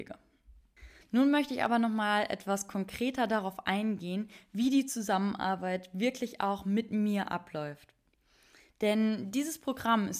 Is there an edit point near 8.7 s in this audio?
no; 1 cut; at 1.0 s

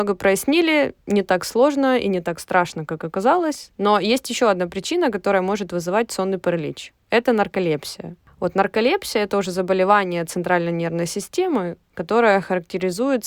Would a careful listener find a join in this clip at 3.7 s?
no; 0 cuts

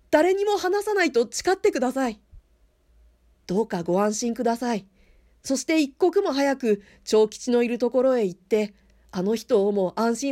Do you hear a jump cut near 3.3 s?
yes; 1 cut; at 3.3 s

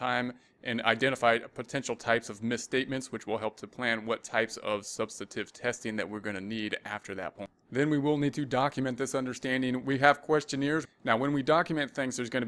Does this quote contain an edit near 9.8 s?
yes; 2 cuts; at 9.8 s, 10.8 s

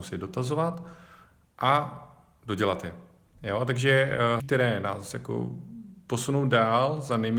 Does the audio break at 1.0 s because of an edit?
no; 1 cut; at 4.4 s

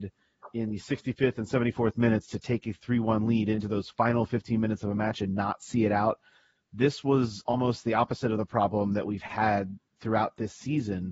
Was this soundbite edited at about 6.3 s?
no; 0 cuts

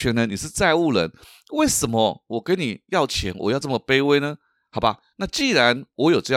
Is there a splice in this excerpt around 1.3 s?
no; 0 cuts

